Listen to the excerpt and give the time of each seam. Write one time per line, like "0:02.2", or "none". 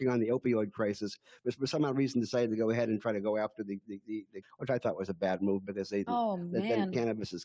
0:04.4
0:06.1

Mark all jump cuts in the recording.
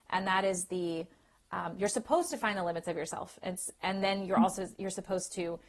none

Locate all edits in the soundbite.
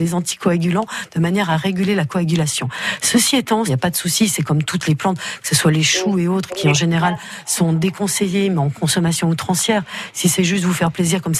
0:03.7

